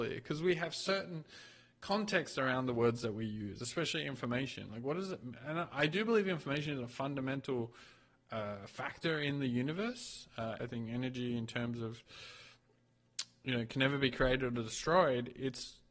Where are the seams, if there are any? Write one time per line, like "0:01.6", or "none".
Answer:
0:10.6

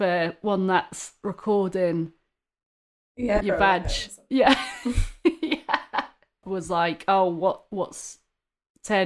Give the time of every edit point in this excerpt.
0:03.4
0:06.4

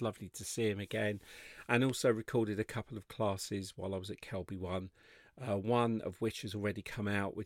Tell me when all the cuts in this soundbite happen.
none

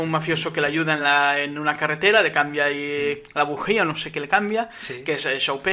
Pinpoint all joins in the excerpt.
none

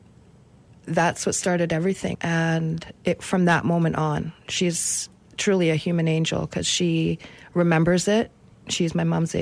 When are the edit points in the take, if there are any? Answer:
0:02.1

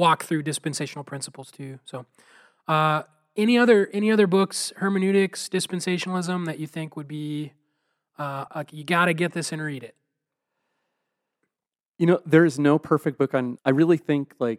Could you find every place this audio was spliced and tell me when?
0:08.5
0:13.6

